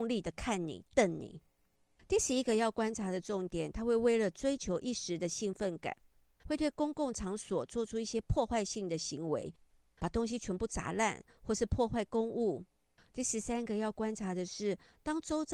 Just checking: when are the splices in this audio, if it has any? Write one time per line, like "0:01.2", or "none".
0:13.1